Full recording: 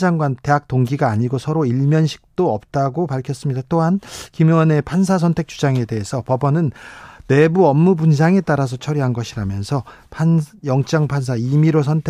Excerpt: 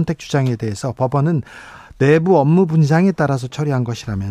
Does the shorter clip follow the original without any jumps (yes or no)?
yes